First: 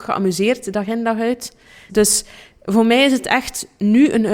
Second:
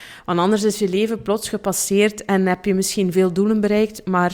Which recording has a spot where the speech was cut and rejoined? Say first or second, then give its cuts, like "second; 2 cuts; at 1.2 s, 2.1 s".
first; 1 cut; at 1.9 s